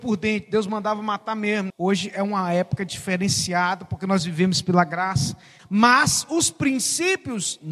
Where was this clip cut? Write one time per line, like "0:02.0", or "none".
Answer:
0:01.7
0:05.6